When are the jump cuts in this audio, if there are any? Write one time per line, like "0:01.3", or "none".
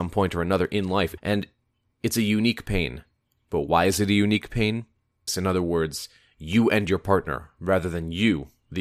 0:01.2
0:05.3